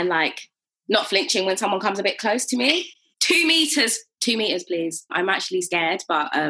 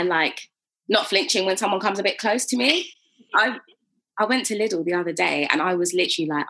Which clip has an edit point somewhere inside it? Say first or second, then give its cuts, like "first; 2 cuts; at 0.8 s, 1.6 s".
first; 2 cuts; at 3.1 s, 5.1 s